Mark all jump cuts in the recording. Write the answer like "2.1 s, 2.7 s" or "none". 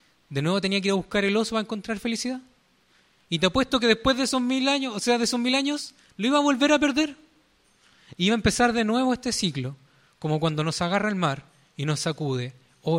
none